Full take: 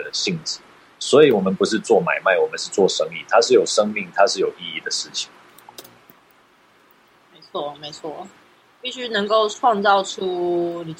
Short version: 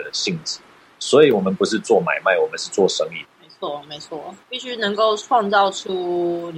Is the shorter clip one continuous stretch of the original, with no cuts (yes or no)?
no